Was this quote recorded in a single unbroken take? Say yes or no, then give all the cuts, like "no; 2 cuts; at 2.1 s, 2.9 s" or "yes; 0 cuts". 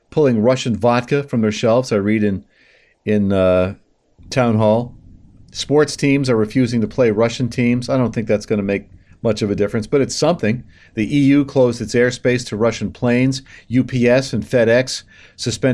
yes; 0 cuts